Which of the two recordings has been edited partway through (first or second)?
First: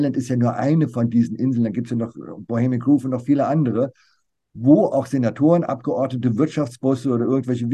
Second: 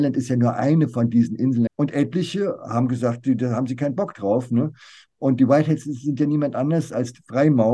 second